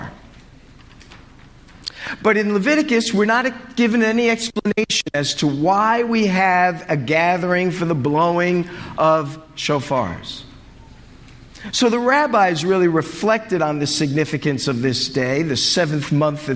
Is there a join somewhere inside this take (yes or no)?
no